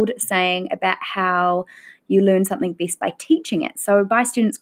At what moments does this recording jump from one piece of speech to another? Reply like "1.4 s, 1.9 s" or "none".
none